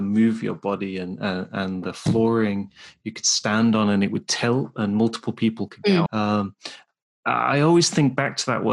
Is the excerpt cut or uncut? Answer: cut